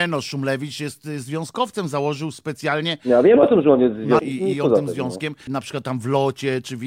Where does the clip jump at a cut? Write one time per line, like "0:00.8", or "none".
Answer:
0:04.2
0:05.5